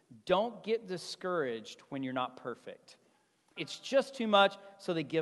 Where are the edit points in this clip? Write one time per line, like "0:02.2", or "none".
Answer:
0:03.6